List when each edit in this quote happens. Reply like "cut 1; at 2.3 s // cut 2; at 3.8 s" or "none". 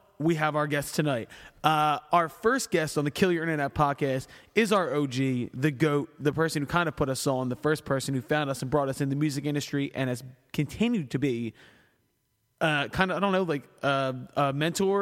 none

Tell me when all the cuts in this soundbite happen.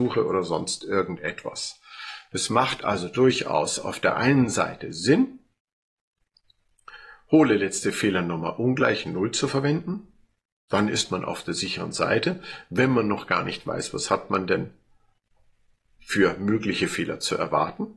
none

